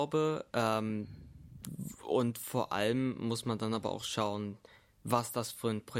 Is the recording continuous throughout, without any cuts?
yes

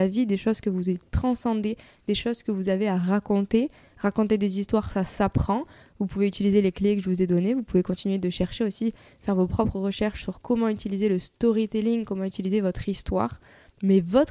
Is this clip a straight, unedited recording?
yes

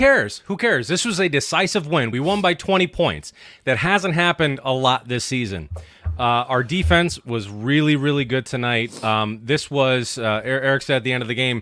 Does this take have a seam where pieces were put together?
no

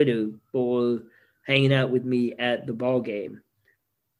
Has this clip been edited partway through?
no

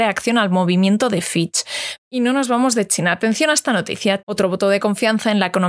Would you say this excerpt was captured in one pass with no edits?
no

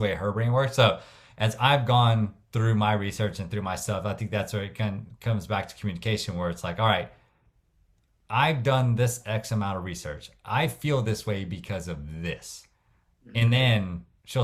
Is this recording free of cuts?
yes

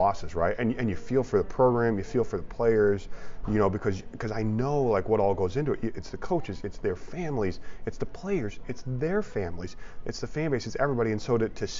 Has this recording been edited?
no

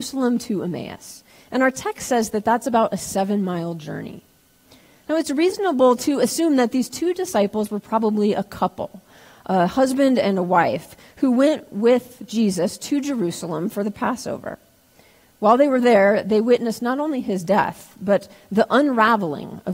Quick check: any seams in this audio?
no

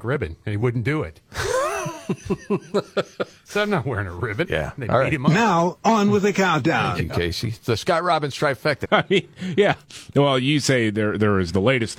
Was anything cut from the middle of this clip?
yes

